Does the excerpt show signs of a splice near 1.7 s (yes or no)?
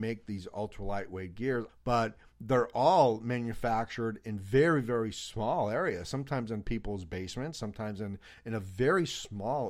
yes